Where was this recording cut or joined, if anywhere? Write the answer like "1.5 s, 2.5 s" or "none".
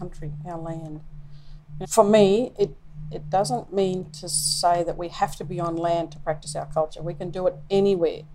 1.8 s